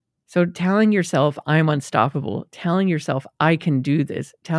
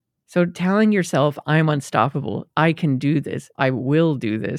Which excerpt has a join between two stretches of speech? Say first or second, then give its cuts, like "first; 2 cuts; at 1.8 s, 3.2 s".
second; 2 cuts; at 2.5 s, 3.6 s